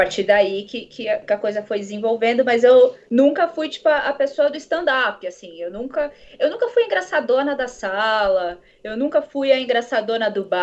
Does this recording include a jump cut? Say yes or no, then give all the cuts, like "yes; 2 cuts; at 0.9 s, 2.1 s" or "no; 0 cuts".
yes; 1 cut; at 3.0 s